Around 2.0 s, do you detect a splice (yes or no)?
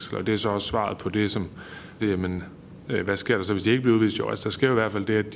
yes